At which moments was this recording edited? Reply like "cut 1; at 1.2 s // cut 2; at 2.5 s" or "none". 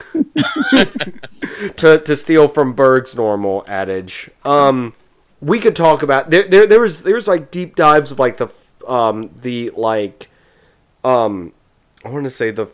cut 1; at 5.3 s